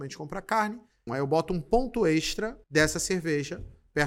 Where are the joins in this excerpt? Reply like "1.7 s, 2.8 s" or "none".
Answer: 1.1 s, 2.6 s